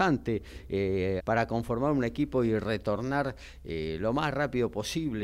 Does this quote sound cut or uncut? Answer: cut